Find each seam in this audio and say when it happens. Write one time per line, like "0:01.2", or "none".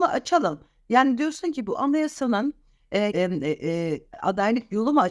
0:03.1